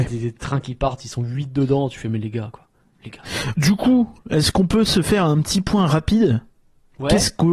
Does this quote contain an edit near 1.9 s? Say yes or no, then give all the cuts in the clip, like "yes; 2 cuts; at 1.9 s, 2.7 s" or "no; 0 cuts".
no; 1 cut; at 3.5 s